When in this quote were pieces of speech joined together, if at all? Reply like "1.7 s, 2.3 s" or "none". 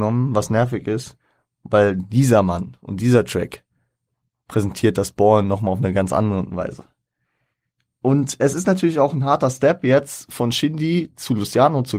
none